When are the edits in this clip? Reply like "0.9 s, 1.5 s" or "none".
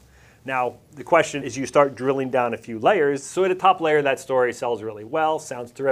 1.4 s